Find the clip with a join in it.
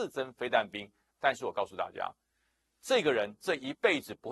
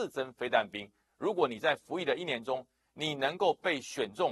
first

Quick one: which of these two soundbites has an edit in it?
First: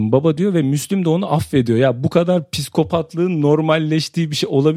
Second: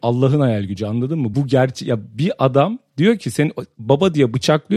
second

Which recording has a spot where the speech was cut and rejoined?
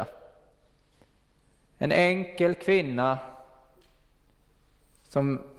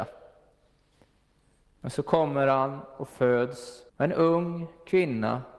second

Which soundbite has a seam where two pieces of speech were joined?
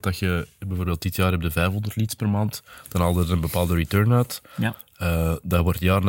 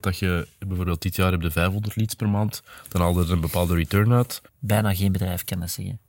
second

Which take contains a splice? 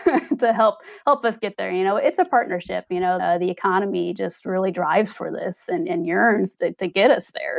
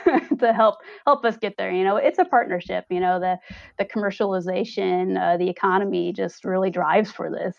first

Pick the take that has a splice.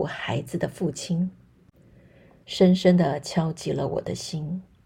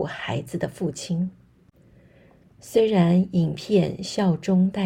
first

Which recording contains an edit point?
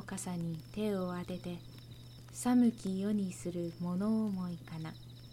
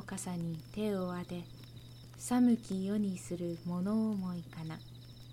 second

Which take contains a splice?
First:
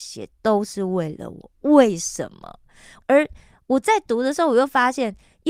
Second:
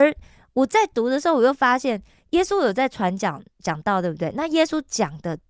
first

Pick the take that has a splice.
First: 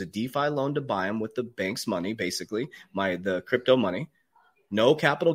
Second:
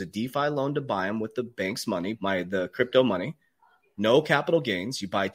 second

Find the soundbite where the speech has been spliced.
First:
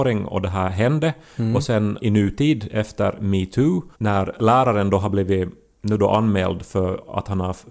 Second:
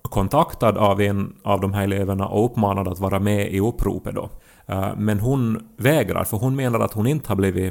first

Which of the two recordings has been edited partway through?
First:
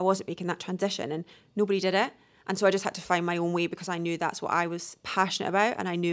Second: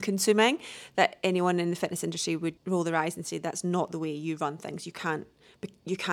second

